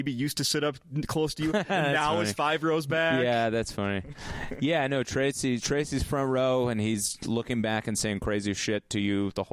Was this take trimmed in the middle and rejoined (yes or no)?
no